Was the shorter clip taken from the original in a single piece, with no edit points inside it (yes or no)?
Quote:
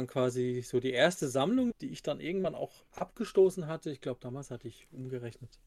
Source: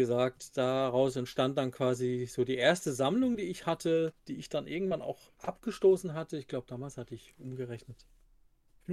no